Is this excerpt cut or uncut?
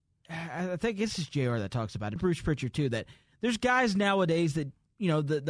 cut